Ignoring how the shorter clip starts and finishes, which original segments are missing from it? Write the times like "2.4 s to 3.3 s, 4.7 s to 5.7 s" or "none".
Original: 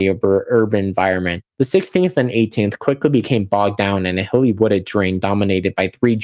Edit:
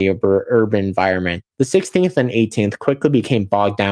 none

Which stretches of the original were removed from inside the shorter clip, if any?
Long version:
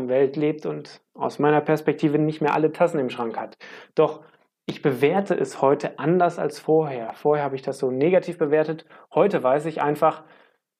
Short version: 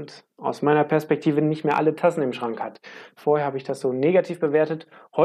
3.9 s to 7.1 s

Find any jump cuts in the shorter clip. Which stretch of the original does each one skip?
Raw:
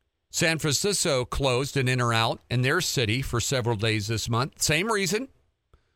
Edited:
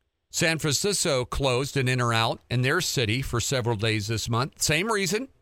none

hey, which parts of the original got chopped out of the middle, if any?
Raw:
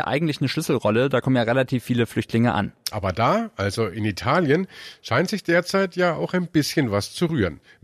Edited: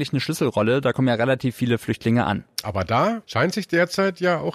3.5 s to 5.0 s

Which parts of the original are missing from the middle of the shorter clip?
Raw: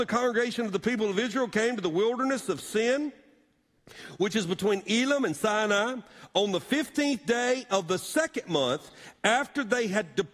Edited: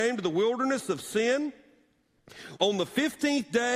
4.2 s to 6.3 s

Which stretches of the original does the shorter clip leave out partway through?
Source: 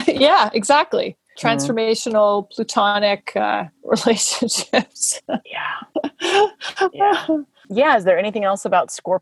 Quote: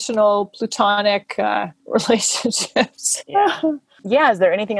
5.2 s to 6.9 s

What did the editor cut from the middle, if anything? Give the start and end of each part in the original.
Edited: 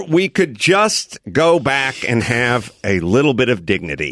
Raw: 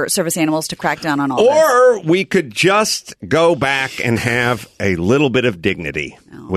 none

